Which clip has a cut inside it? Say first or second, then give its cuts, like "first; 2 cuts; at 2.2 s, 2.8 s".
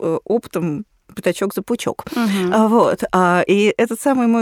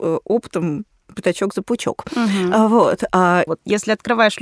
second; 1 cut; at 3.5 s